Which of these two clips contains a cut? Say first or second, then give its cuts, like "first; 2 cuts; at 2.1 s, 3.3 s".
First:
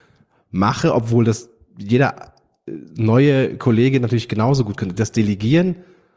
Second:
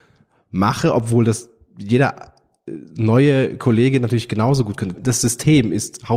second; 1 cut; at 4.9 s